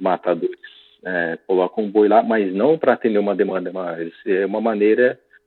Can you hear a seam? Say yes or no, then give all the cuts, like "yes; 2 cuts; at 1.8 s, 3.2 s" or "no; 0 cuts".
no; 0 cuts